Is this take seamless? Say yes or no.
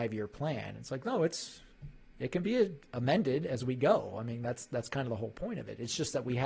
yes